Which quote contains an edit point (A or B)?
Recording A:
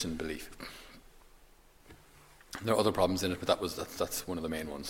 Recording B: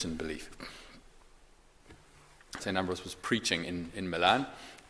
B